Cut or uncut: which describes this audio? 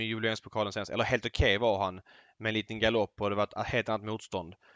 uncut